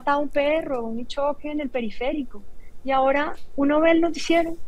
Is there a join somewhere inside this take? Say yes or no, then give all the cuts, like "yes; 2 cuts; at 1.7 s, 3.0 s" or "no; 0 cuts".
no; 0 cuts